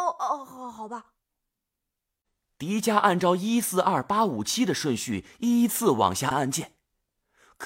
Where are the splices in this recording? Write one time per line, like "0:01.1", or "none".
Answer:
0:06.3